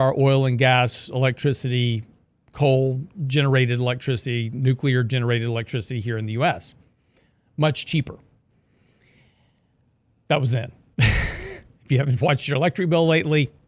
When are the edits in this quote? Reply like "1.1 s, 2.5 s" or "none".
none